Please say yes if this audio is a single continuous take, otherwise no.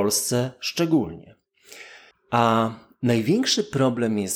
no